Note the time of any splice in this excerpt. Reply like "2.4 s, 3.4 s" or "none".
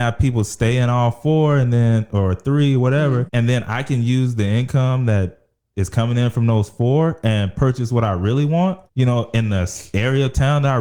3.3 s, 8.9 s